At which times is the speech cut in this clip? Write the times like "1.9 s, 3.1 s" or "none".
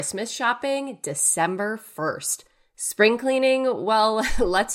none